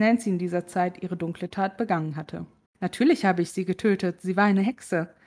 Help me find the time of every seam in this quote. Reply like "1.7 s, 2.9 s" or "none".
2.7 s